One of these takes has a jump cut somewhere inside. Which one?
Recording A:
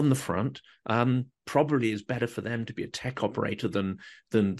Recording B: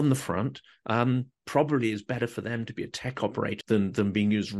B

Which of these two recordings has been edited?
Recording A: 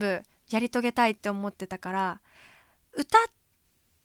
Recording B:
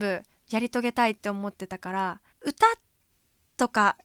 B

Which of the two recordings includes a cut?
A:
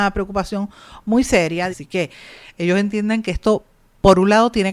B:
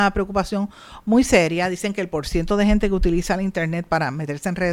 A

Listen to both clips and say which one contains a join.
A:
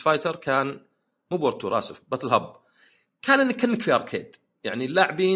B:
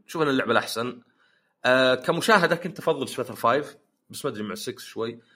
A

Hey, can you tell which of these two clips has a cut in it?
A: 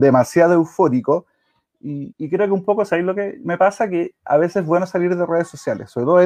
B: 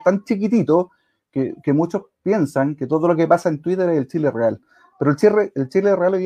A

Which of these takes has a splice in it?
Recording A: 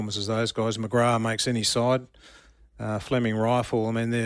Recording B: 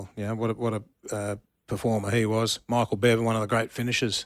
B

